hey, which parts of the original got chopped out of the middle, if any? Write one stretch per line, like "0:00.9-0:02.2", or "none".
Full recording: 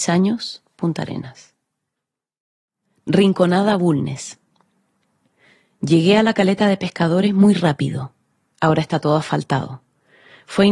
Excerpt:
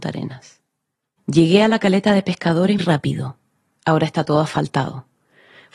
0:02.1-0:05.7
0:07.3-0:07.5

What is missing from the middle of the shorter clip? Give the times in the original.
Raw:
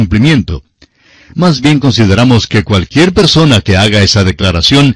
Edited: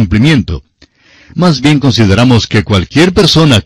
none

